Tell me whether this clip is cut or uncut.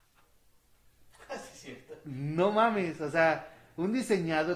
uncut